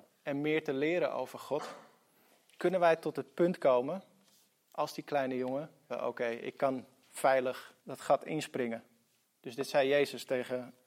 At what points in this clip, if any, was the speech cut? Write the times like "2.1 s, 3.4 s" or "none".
5.9 s, 7.8 s, 9.2 s